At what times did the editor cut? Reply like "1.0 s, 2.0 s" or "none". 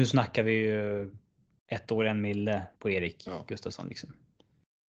2.7 s